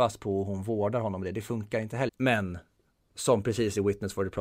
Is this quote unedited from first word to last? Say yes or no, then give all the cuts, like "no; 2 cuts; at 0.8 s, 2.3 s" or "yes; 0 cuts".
no; 1 cut; at 2.1 s